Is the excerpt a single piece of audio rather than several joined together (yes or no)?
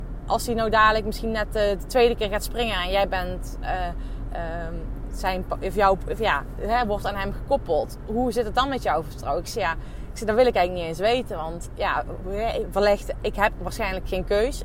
yes